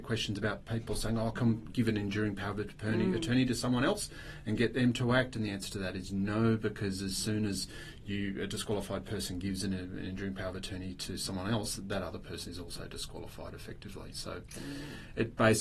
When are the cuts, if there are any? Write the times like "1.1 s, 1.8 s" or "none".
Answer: 1.7 s